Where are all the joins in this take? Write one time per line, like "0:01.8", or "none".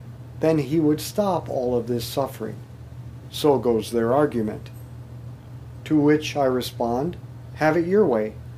0:07.5